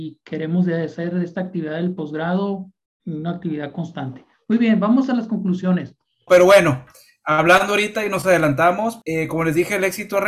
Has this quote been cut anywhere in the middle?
yes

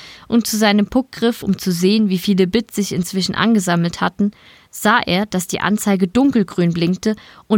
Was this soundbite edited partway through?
no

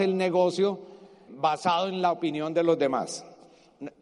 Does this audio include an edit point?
yes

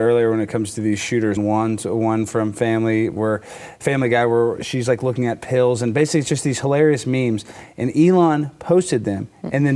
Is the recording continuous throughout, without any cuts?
no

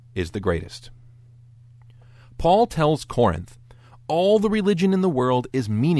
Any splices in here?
no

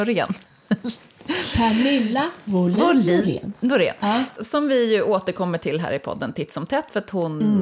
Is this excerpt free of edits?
yes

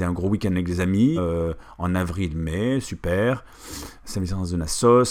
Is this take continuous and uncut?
no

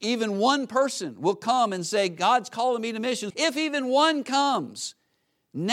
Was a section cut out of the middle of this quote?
yes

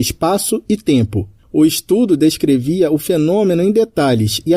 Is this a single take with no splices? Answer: no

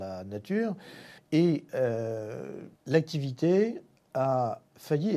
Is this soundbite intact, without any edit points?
no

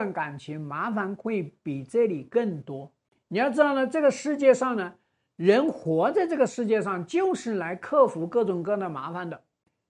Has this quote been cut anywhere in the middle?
no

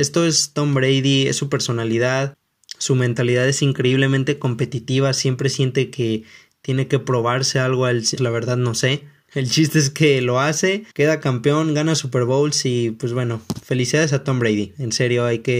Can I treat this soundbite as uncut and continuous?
no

